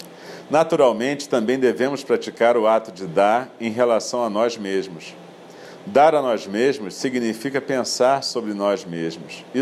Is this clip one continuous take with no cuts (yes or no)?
yes